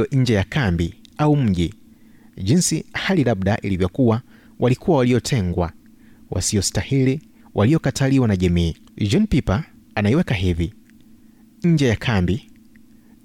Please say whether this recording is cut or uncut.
cut